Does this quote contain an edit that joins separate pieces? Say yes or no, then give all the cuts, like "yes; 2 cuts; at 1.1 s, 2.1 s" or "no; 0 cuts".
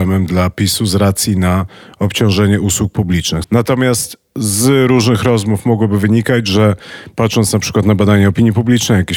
yes; 1 cut; at 3.4 s